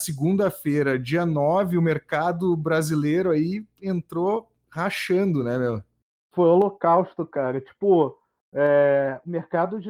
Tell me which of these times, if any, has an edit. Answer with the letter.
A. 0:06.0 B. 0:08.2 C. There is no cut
C